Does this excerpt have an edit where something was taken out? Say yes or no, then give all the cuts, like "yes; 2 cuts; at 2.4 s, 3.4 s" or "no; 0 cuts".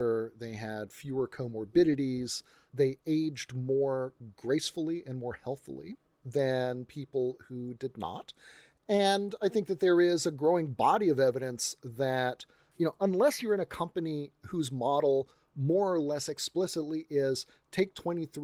no; 0 cuts